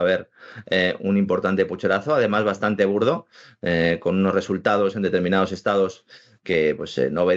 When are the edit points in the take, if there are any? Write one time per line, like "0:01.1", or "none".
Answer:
none